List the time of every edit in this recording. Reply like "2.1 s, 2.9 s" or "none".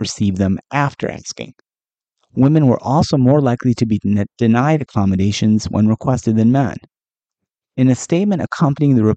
none